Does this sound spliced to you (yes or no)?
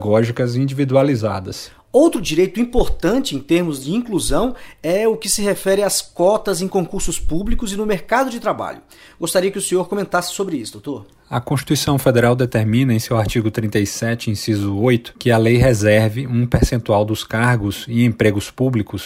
no